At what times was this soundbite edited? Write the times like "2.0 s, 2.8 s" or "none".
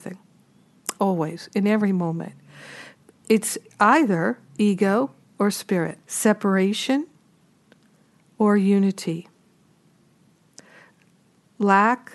1.0 s, 4.5 s, 6.0 s